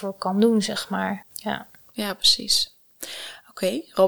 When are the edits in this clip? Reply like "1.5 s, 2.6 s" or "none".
1.3 s